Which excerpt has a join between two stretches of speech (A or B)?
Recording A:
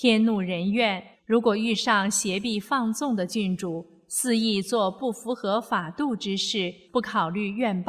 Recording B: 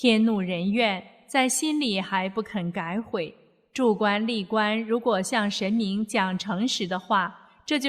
A